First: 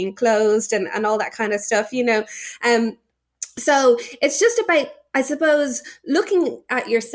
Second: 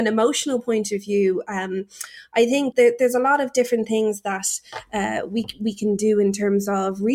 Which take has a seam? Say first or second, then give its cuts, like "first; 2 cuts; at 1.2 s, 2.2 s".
second; 1 cut; at 2.7 s